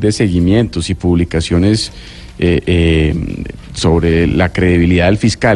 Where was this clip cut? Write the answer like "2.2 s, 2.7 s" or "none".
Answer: none